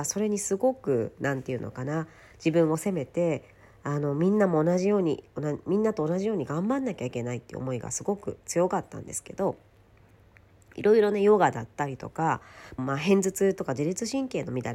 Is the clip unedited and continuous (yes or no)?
no